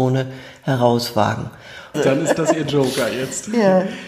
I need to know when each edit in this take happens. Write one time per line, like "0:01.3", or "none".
0:01.9